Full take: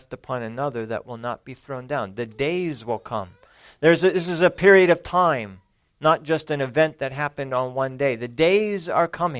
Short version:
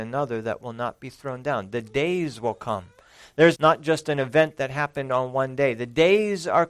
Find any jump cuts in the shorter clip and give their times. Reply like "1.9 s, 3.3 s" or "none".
3.5 s